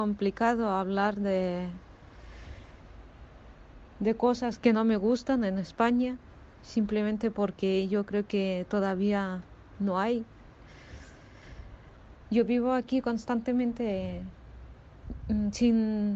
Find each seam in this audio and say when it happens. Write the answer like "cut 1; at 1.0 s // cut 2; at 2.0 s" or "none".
cut 1; at 4.6 s